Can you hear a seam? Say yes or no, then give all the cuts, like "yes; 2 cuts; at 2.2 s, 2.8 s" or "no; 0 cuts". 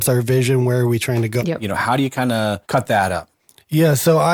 yes; 2 cuts; at 1.4 s, 2.6 s